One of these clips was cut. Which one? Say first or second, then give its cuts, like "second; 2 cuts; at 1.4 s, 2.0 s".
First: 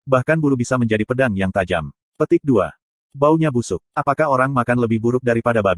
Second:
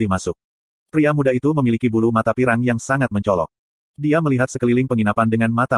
first; 1 cut; at 3.0 s